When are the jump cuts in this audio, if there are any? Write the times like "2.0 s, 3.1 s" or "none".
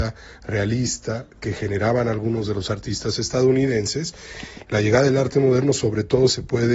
4.6 s